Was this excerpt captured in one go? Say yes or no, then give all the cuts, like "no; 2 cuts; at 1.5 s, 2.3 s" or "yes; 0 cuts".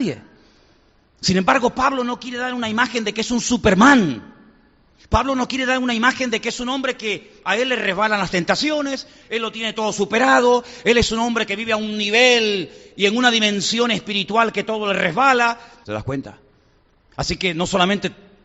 no; 2 cuts; at 9.2 s, 15.8 s